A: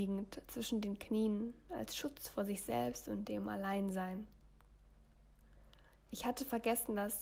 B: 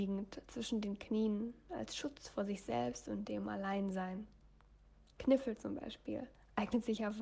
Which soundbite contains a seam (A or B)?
B